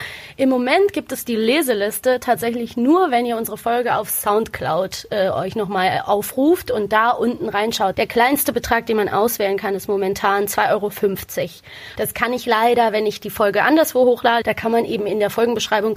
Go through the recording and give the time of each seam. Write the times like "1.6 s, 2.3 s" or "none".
7.9 s, 12.0 s, 14.4 s